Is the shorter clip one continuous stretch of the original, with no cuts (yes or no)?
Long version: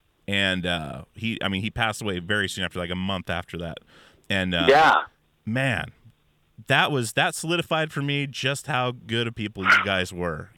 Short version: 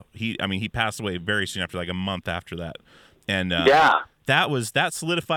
no